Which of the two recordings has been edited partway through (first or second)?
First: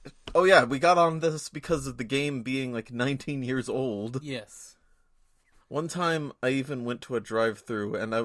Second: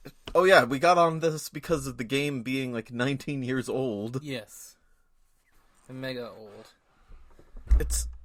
first